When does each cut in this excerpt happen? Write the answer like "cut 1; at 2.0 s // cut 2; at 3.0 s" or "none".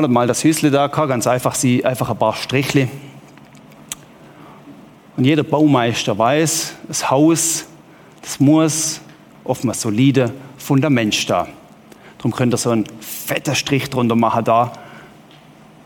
none